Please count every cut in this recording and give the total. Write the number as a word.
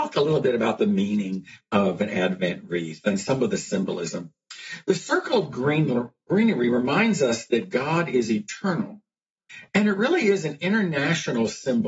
one